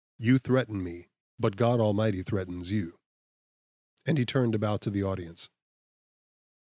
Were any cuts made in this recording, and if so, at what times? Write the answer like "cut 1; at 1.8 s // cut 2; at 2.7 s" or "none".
cut 1; at 1.2 s